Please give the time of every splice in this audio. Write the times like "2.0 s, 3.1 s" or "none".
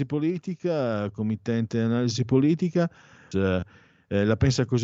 3.3 s